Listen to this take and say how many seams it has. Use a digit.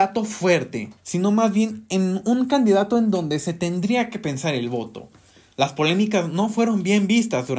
1